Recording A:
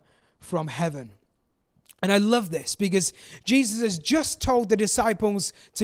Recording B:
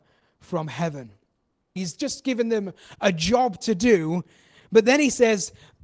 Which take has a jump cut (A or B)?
B